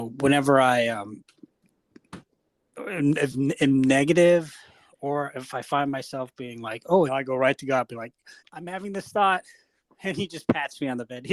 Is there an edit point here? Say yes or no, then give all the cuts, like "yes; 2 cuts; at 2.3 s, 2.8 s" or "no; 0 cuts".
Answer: yes; 2 cuts; at 7.1 s, 8.4 s